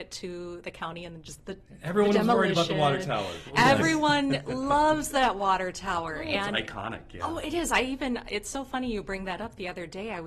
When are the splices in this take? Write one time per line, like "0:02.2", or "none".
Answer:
none